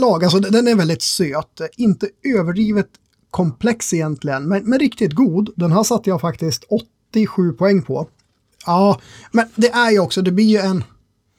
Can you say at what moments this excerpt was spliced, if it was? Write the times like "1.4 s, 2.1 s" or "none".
8.5 s